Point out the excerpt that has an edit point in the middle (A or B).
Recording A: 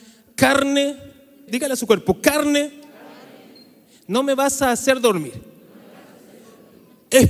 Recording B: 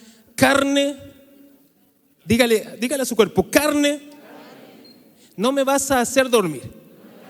A